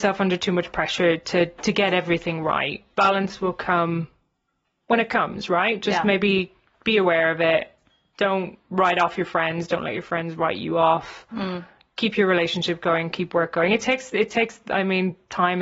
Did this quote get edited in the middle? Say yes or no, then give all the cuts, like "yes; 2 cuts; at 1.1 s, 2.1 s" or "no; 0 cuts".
no; 0 cuts